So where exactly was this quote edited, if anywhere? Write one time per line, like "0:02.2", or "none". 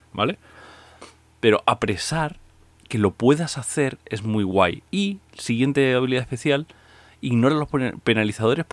0:04.9

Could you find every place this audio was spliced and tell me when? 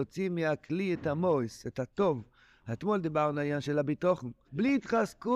0:04.5

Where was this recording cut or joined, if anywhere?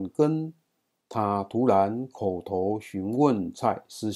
0:01.0

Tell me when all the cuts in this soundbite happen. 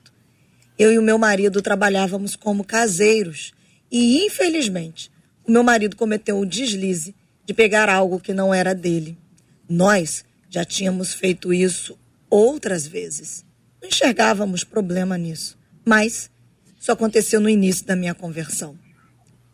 none

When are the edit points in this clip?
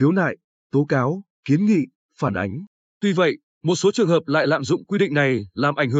none

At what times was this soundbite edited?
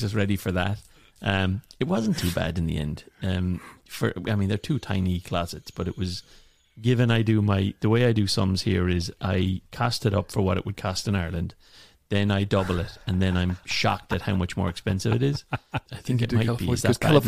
0:15.9

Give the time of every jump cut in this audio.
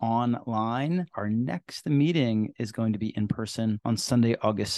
0:01.1

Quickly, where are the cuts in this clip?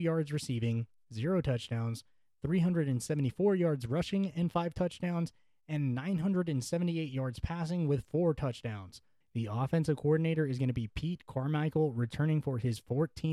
0:09.2

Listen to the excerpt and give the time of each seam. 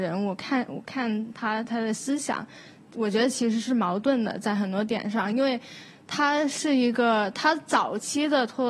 0:01.6

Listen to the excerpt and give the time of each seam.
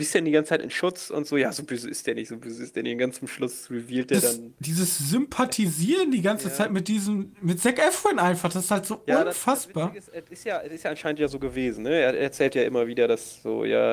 none

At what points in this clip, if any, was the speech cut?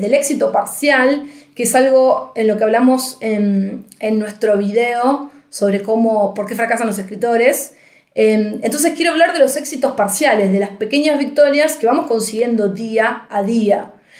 none

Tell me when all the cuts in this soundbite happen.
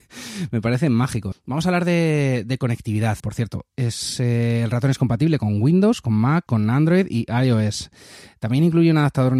0:01.3
0:03.2
0:06.5

